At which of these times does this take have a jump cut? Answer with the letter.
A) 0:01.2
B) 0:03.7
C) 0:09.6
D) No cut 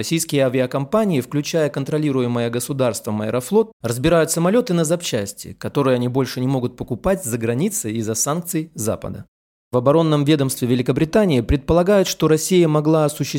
C